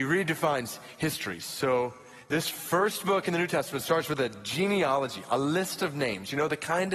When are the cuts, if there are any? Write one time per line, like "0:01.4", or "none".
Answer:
none